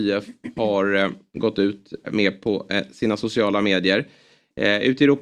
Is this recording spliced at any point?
yes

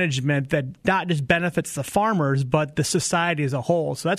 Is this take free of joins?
yes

